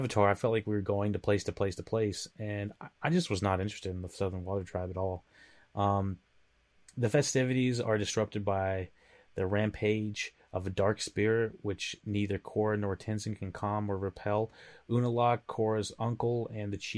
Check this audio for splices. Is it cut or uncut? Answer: uncut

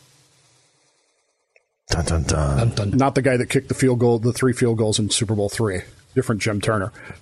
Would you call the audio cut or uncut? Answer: cut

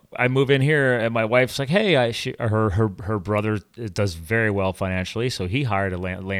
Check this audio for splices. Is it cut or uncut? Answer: uncut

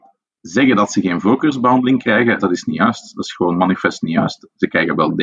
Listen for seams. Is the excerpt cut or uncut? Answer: cut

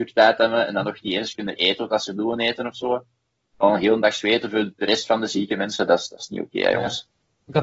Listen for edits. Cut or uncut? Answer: cut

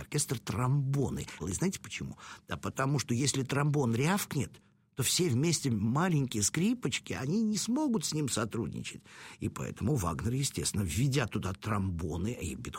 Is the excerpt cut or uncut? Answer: cut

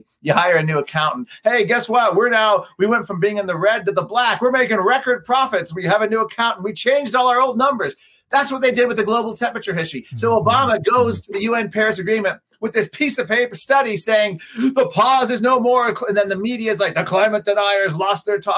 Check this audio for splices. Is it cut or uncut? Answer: uncut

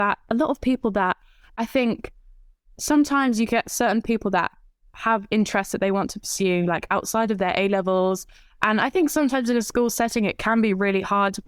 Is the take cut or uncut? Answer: uncut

